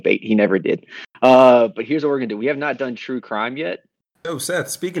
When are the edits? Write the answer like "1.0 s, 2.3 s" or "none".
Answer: 4.1 s